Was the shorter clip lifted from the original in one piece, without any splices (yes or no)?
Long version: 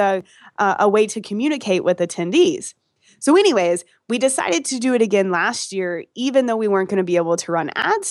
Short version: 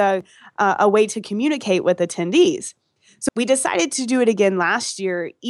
no